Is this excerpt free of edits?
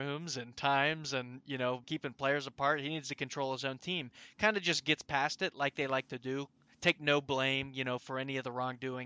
no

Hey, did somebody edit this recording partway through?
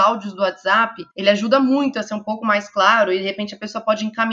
yes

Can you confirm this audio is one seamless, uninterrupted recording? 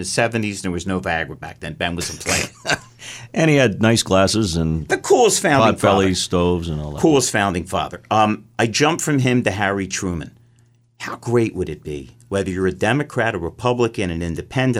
yes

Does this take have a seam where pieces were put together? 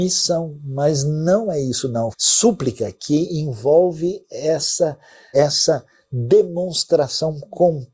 yes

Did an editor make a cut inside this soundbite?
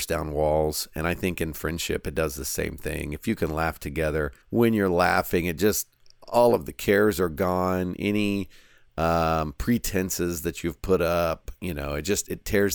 yes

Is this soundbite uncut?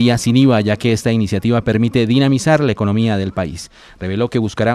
yes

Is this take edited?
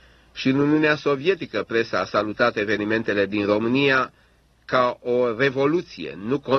no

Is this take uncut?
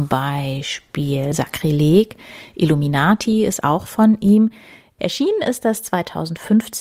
no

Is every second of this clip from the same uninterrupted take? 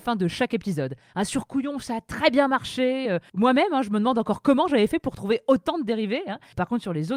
yes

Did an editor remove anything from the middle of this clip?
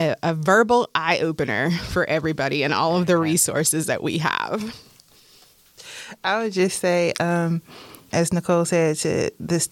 yes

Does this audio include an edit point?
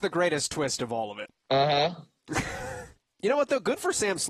yes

